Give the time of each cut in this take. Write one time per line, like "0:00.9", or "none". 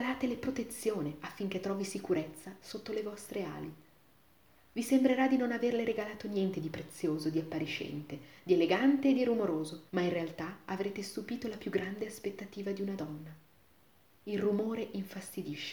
0:09.9